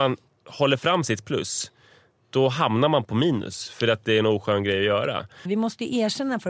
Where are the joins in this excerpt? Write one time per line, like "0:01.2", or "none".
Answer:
0:05.5

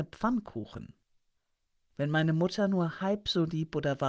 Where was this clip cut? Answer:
none

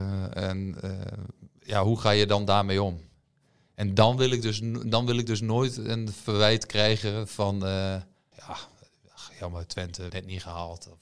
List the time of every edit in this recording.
0:08.3
0:10.1

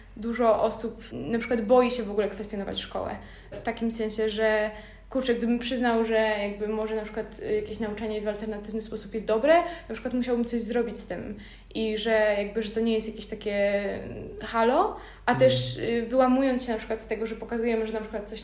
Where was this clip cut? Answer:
none

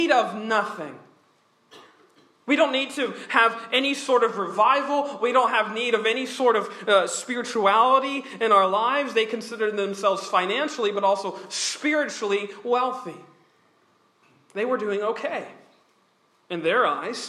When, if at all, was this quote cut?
none

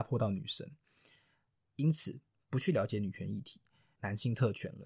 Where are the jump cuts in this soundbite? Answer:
0:03.9

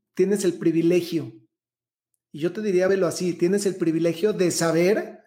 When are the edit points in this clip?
none

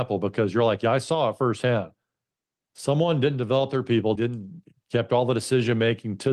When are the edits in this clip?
0:04.1

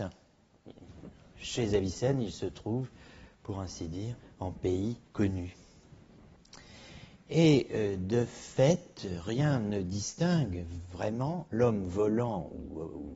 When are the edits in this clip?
0:05.1

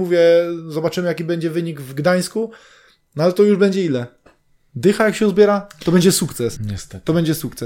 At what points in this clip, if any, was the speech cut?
0:06.6

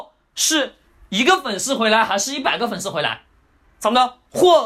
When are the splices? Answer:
0:03.6

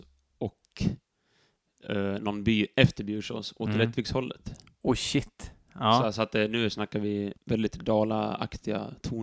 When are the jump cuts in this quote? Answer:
0:07.4

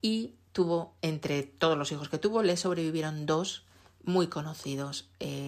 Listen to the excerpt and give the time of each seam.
0:01.0

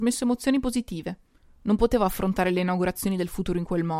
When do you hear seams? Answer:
0:01.4

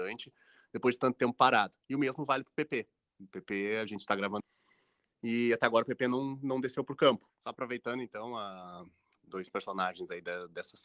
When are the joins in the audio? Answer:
0:07.3
0:09.2

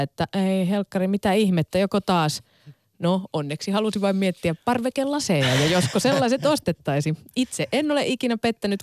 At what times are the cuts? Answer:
none

